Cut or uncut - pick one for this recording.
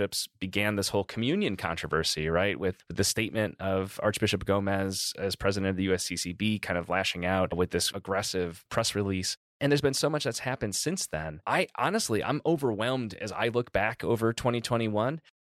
cut